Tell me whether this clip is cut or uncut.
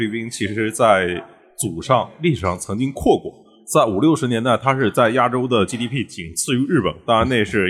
uncut